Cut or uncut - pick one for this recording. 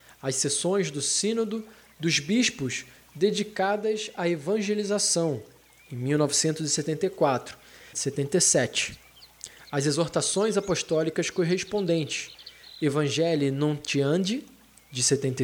cut